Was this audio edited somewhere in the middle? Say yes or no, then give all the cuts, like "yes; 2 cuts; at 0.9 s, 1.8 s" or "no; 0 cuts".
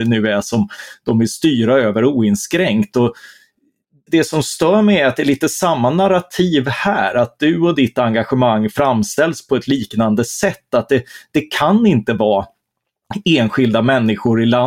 yes; 1 cut; at 4.1 s